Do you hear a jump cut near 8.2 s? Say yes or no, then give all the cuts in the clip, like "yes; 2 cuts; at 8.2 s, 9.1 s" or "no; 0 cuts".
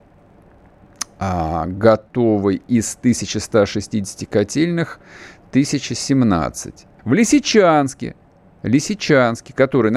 no; 1 cut; at 7.0 s